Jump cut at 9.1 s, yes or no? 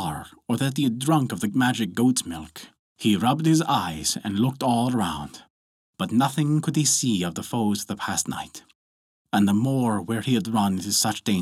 no